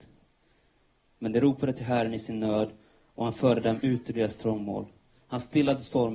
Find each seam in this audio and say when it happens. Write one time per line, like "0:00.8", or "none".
none